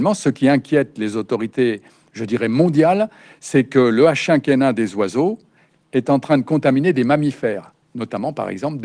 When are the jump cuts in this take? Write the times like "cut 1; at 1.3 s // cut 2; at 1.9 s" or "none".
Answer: none